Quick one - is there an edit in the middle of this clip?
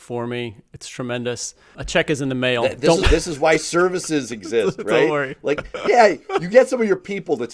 no; 0 cuts

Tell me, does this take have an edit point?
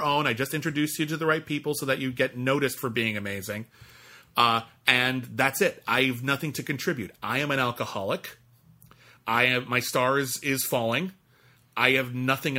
no; 0 cuts

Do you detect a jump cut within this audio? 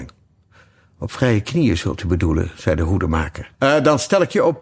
yes; 1 cut; at 3.5 s

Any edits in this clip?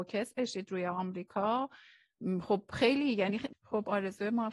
yes; 1 cut; at 3.5 s

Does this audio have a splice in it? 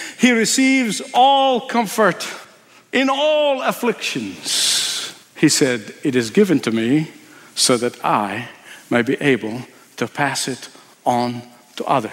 no; 0 cuts

